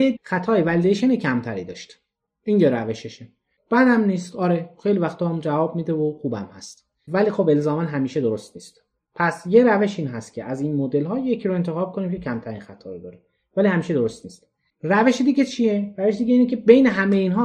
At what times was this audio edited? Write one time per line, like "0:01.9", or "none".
none